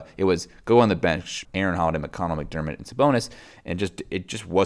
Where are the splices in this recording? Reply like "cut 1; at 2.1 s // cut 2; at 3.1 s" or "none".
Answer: cut 1; at 1.4 s

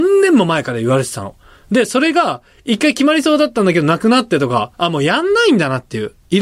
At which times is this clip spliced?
cut 1; at 4.7 s

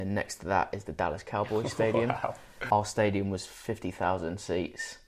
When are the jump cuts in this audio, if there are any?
cut 1; at 2.7 s

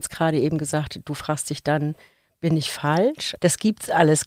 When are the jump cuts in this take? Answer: cut 1; at 3.4 s

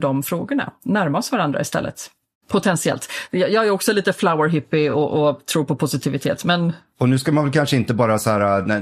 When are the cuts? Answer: none

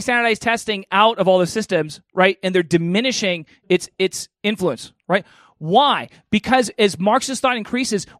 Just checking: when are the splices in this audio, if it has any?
none

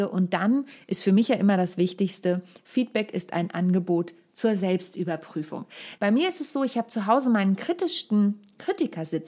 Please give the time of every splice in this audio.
cut 1; at 6.0 s

